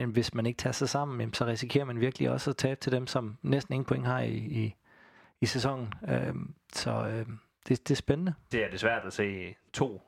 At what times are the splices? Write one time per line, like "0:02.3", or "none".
0:08.5